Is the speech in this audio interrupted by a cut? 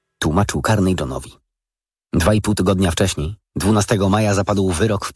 no; 0 cuts

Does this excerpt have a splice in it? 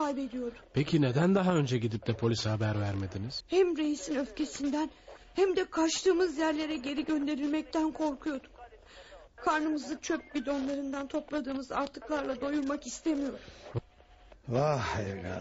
yes; 2 cuts; at 3.4 s, 9.3 s

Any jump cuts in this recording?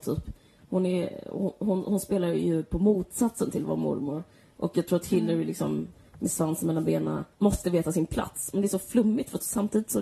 yes; 1 cut; at 7.3 s

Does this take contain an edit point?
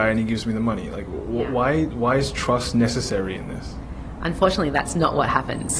no; 0 cuts

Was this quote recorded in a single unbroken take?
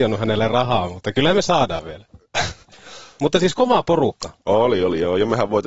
yes; 0 cuts

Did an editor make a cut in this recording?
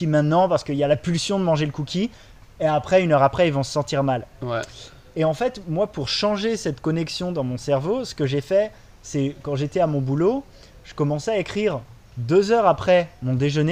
no; 0 cuts

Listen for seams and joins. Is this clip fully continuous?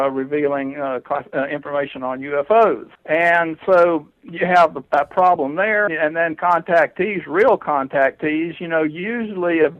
no; 2 cuts; at 3.0 s, 5.9 s

